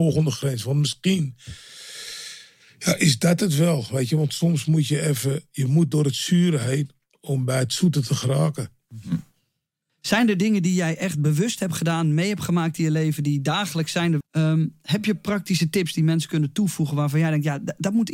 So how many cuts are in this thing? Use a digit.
1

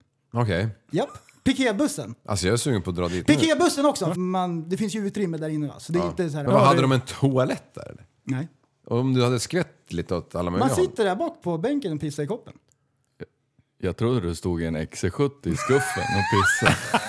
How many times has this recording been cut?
2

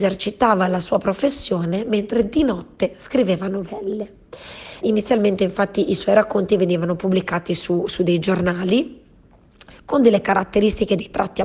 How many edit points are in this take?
1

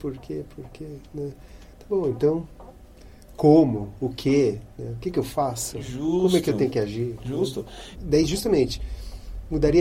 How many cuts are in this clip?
1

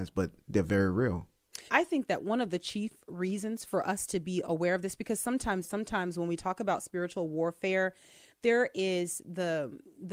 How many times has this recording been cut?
2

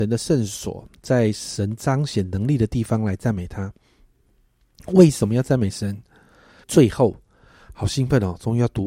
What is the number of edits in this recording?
1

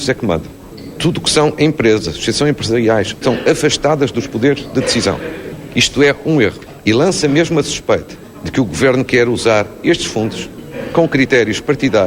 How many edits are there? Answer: 1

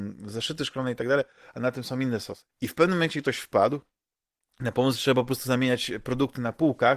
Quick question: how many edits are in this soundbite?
1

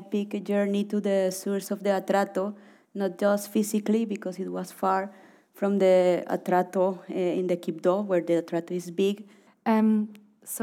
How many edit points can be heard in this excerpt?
1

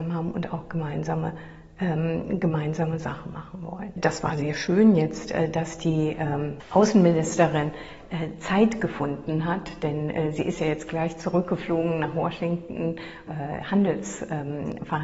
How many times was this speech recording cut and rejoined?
1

